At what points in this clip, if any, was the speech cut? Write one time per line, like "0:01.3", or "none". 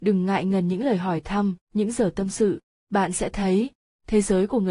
0:01.6